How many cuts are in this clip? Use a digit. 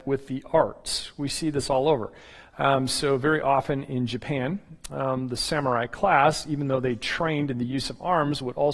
0